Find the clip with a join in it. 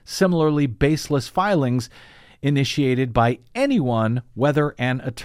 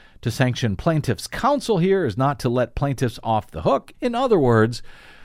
second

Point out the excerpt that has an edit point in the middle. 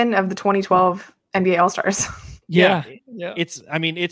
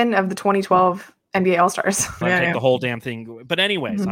second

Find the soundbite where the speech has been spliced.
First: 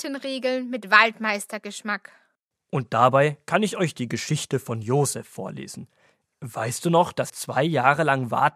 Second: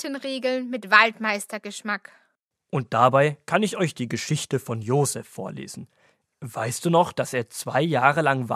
first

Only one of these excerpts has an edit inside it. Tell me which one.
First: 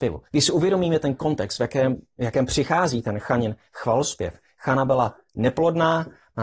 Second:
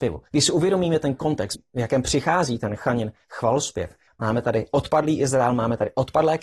second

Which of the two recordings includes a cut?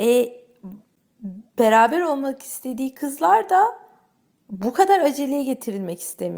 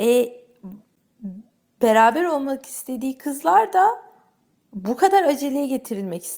first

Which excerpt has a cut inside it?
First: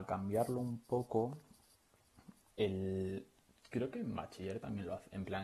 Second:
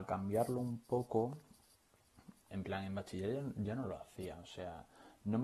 second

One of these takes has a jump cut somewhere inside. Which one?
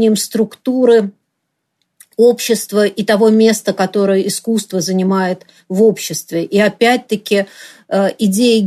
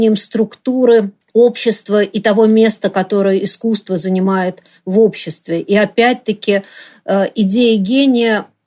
second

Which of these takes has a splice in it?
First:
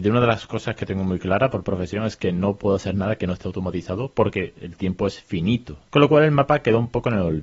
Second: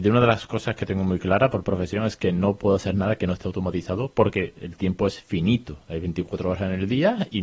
first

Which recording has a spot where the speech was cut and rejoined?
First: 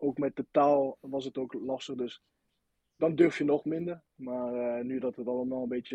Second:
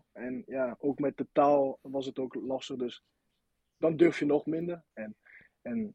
second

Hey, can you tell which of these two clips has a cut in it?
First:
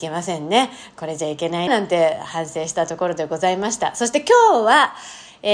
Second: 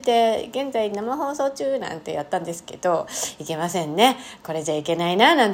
first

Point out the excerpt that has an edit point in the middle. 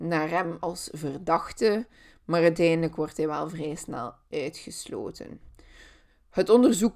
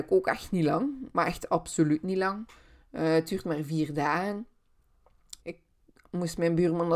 second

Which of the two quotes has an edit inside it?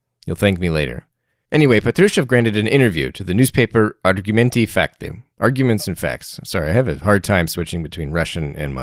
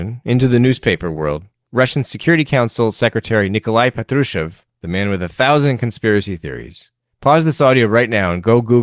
second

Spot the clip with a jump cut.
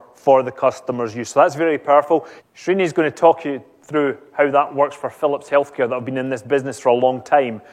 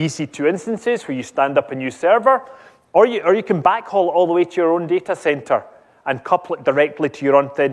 first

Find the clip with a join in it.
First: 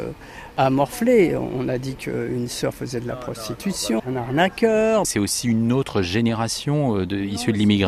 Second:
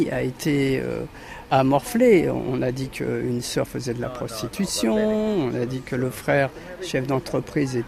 first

